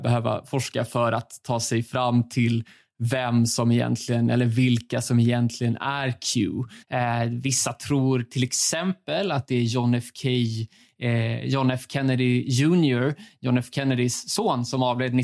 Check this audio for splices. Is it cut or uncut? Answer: cut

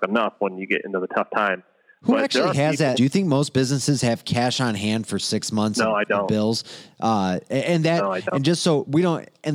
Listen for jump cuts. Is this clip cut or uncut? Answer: cut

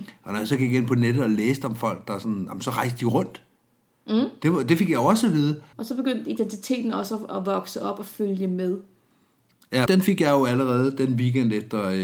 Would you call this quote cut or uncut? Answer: cut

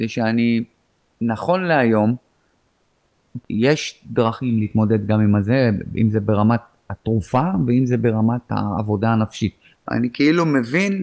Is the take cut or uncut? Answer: cut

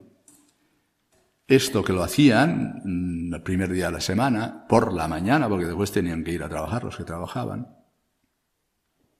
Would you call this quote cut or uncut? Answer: uncut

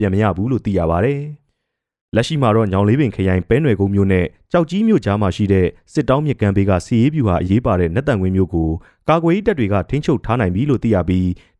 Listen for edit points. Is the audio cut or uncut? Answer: cut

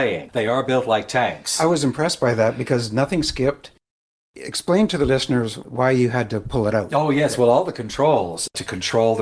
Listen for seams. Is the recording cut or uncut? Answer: uncut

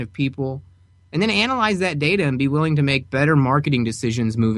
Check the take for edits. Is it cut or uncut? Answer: uncut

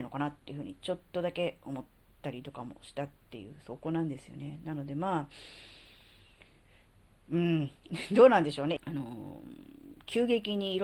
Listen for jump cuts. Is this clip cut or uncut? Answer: cut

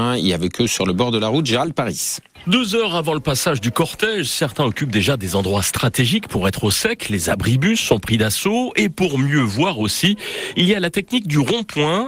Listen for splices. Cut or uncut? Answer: uncut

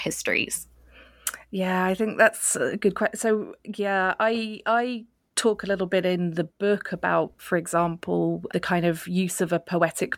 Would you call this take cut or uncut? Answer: cut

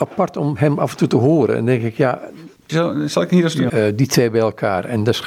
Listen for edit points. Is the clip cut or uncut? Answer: cut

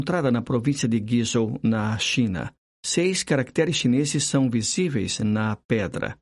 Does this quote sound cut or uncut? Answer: uncut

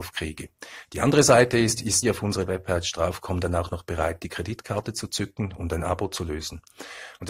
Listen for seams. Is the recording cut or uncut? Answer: cut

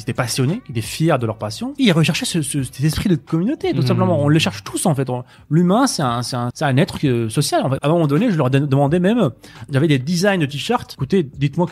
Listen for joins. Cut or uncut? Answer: cut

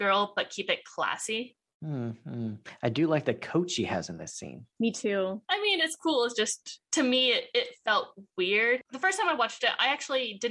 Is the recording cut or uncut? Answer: cut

